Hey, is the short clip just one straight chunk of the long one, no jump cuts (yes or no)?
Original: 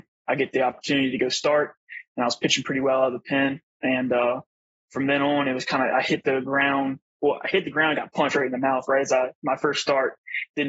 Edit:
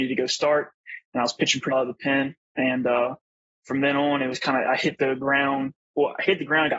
no